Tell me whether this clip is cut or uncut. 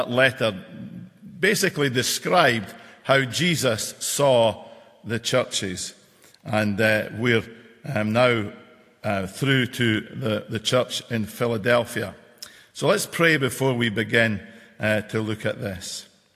uncut